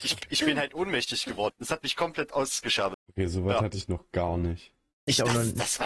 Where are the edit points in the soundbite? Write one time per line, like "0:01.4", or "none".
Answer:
0:01.5
0:02.9